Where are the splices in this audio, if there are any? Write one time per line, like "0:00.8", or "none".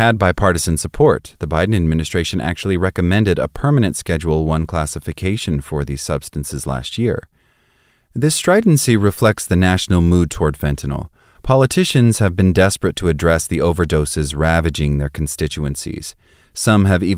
none